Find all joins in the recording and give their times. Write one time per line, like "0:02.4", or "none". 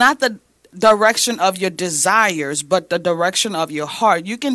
none